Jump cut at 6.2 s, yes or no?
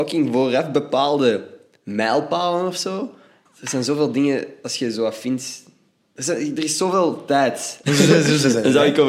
no